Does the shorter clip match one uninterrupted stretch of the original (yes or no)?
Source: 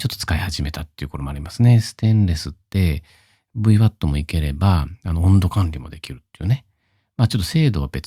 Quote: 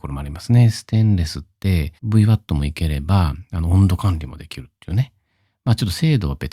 no